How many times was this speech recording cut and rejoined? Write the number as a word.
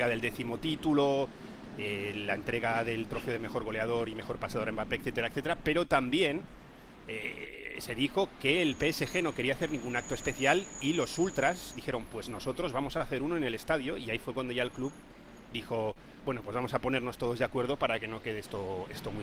zero